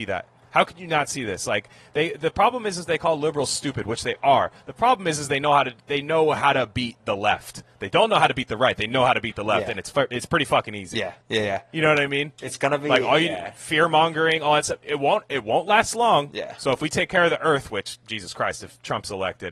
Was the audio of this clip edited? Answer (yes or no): yes